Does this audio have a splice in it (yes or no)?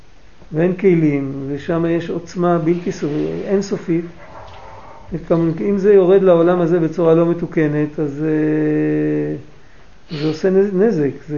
no